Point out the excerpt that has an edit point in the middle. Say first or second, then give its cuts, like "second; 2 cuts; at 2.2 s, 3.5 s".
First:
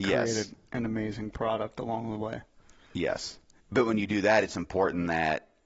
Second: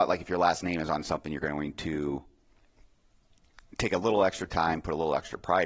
first; 1 cut; at 3.6 s